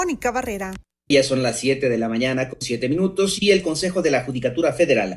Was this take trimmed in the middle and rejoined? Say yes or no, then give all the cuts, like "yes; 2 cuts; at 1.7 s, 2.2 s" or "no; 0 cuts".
yes; 1 cut; at 1.1 s